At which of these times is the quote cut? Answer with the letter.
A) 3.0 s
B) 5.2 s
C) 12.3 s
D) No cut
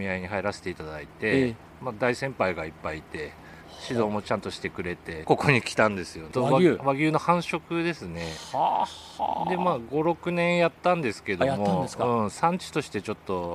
B